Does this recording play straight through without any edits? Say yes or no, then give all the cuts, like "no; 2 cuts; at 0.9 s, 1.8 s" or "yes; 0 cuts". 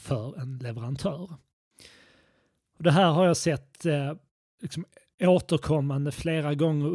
yes; 0 cuts